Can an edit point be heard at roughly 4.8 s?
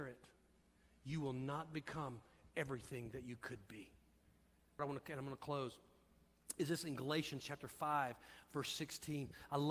yes; 1 cut; at 4.8 s

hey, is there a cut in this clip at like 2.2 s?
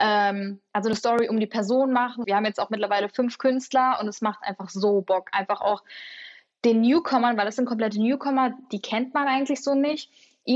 yes; 1 cut; at 2.2 s

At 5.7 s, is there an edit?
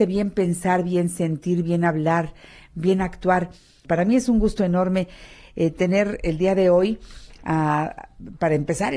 no; 1 cut; at 3.8 s

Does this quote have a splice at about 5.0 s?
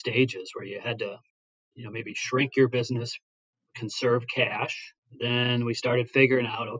yes; 1 cut; at 5.0 s

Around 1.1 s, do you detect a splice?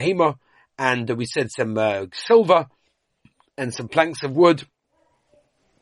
no; 0 cuts

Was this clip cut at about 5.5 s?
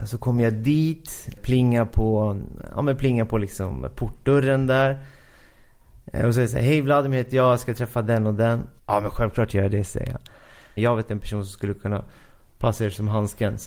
no; 3 cuts; at 1.4 s, 8.8 s, 10.8 s

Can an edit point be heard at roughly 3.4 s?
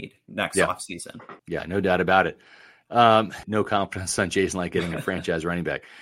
yes; 2 cuts; at 1.4 s, 3.4 s

